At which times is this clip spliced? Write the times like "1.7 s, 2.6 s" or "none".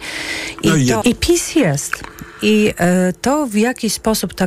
1.0 s